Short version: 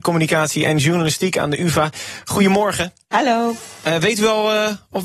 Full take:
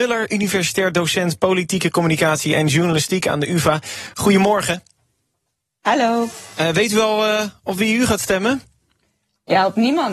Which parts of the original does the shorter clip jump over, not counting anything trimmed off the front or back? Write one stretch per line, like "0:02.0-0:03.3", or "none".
0:04.9-0:05.8